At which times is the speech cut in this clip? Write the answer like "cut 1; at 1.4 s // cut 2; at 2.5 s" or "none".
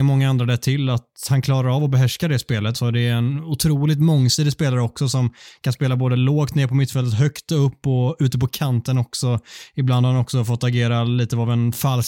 cut 1; at 2.7 s